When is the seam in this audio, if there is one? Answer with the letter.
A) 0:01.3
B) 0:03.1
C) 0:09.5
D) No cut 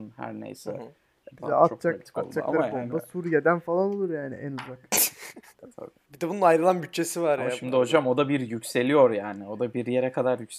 A